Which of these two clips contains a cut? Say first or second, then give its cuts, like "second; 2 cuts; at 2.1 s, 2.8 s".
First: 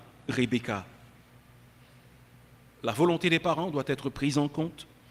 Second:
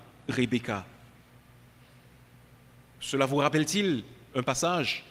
first; 1 cut; at 2.7 s